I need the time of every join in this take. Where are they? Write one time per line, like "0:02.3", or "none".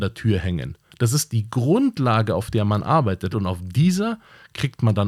0:03.3